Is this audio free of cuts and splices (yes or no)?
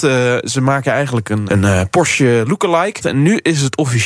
no